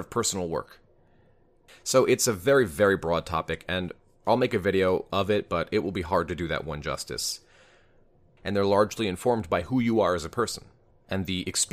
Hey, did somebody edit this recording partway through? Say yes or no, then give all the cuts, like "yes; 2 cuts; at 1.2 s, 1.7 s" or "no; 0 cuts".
yes; 2 cuts; at 1.7 s, 8.4 s